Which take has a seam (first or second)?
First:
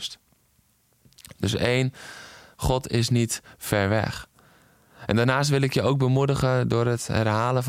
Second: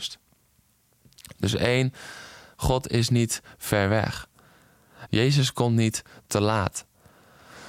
second